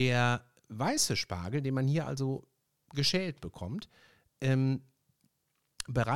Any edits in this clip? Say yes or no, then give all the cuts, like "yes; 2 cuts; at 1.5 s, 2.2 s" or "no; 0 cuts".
no; 0 cuts